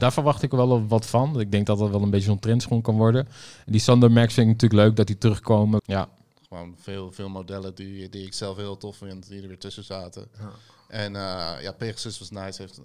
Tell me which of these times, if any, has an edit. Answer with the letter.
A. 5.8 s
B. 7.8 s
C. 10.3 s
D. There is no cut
A